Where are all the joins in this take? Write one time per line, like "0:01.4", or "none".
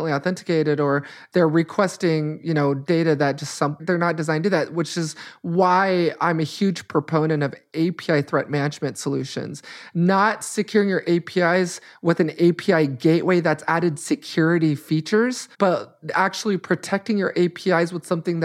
0:03.8
0:15.5